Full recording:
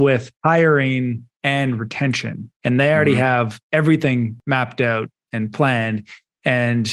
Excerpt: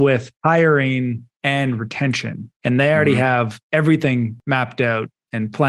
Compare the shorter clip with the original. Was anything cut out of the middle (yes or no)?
no